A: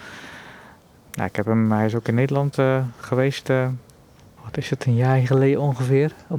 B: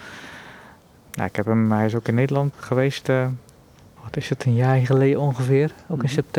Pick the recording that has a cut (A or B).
B